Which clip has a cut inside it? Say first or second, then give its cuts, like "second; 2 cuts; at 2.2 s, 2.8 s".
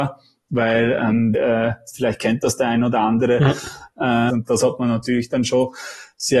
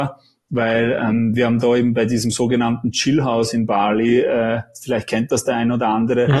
first; 2 cuts; at 1.3 s, 4.3 s